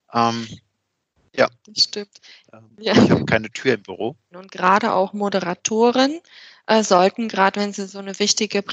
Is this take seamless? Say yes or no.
no